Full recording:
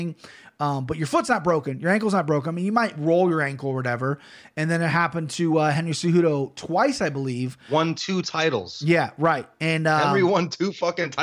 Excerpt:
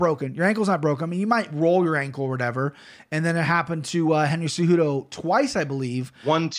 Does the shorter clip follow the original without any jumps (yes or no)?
yes